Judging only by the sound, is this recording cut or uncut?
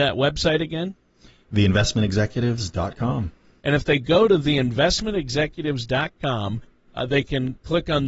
uncut